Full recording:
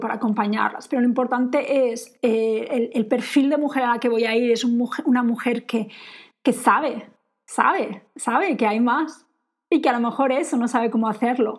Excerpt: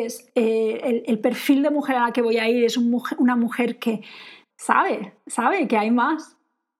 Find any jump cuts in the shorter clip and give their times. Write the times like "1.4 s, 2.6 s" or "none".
4.5 s